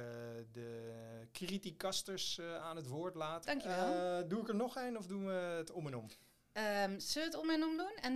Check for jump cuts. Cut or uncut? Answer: cut